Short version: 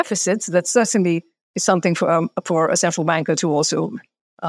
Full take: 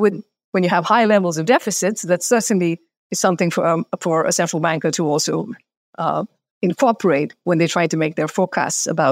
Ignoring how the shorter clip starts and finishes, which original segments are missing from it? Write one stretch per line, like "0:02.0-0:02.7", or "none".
none